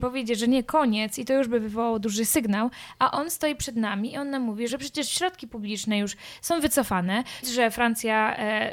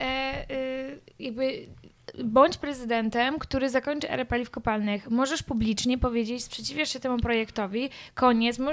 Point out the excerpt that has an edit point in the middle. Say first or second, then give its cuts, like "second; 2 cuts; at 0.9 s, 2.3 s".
first; 2 cuts; at 4.7 s, 7.4 s